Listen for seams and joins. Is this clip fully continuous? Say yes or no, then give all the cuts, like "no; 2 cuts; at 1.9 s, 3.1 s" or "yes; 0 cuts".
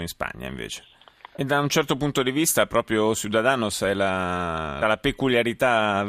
no; 2 cuts; at 1.4 s, 4.8 s